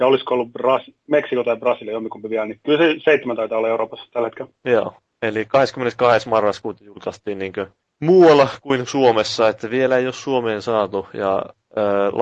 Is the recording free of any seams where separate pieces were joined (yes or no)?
yes